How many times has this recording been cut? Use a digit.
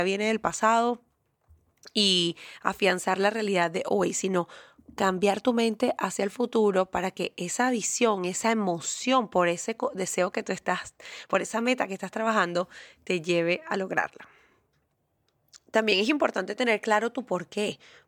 0